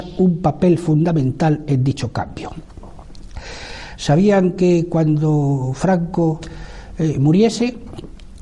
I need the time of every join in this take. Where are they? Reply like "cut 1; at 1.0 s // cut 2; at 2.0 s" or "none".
cut 1; at 4.0 s